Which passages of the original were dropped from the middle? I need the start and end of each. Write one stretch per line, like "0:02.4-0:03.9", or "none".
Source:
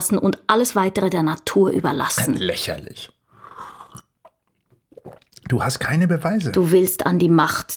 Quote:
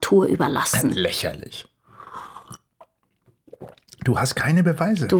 none